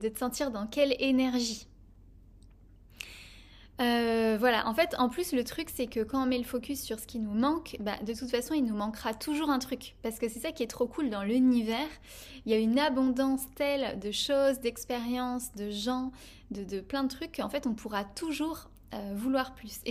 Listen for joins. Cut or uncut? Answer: uncut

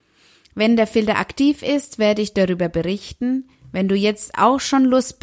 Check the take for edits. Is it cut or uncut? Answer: uncut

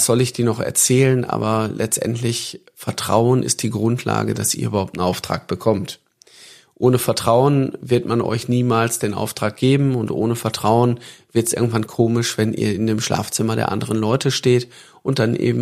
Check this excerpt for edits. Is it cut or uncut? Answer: uncut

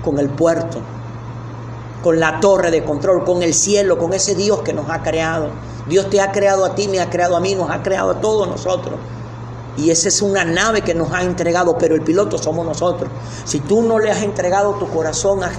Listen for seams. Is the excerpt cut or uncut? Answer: cut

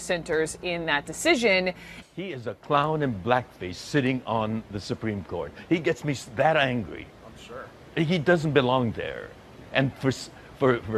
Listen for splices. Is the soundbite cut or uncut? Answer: uncut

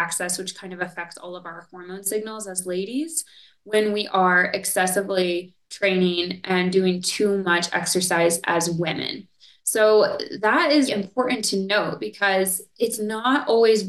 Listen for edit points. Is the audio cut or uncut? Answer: cut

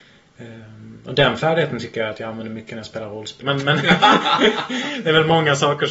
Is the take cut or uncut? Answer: cut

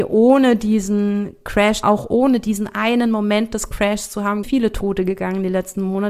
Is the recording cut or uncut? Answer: cut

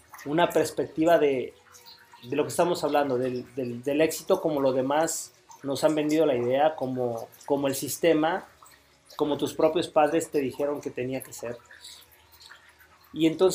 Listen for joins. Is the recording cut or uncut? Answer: uncut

